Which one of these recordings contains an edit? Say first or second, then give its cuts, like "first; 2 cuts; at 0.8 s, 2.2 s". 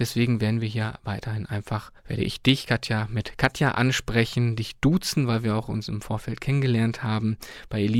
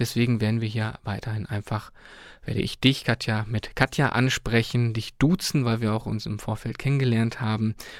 first; 1 cut; at 2.0 s